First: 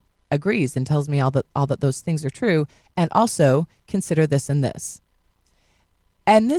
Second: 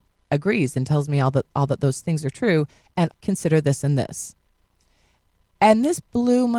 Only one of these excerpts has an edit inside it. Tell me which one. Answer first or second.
second